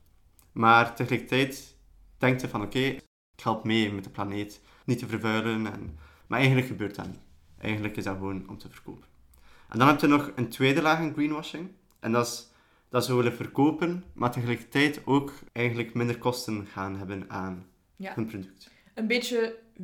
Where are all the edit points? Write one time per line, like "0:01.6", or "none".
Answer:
none